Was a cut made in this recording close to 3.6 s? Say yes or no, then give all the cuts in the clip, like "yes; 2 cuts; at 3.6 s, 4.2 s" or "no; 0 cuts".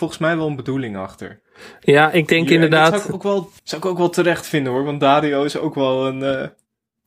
yes; 1 cut; at 3.6 s